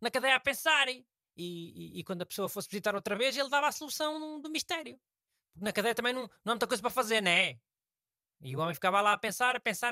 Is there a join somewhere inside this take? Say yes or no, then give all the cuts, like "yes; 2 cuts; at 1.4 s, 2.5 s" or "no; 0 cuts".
no; 0 cuts